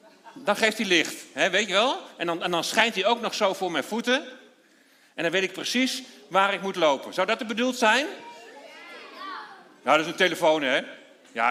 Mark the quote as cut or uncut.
uncut